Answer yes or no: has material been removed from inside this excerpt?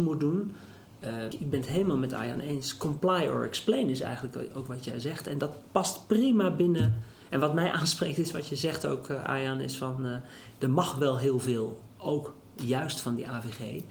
yes